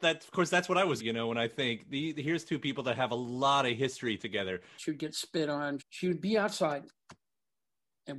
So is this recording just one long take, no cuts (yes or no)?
no